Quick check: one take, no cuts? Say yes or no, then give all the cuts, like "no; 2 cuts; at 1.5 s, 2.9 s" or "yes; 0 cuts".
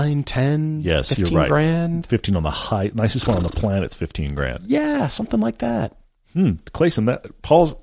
yes; 0 cuts